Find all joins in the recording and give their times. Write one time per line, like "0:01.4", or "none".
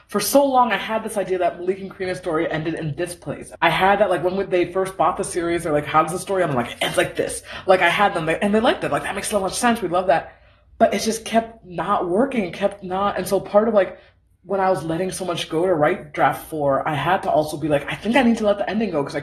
0:03.5